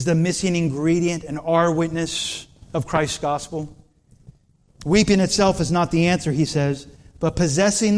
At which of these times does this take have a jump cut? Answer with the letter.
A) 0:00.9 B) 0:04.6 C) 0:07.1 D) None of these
D